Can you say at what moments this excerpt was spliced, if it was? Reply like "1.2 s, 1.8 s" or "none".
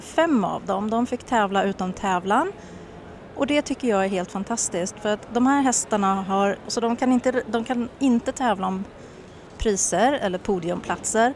6.6 s